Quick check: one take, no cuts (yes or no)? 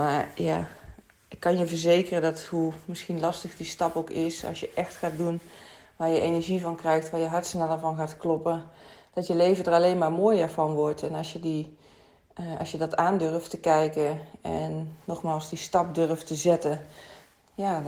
yes